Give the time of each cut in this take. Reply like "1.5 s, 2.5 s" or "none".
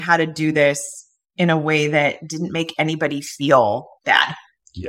none